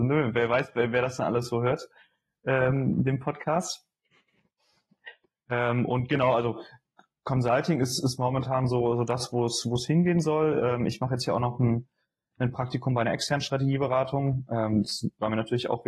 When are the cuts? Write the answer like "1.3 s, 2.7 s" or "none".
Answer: none